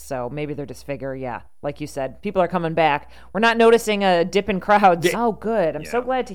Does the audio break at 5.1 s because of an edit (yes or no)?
yes